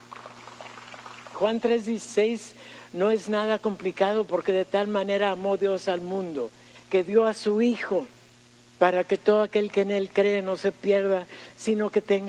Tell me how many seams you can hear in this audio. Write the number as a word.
one